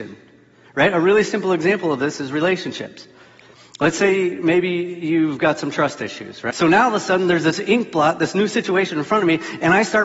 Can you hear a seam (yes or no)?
yes